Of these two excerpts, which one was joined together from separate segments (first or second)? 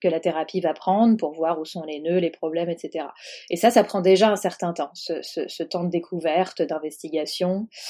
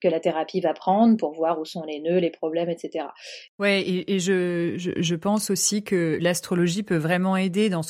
second